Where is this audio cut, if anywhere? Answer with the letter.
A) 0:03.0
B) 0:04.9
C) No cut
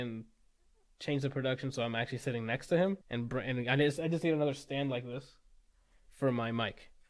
A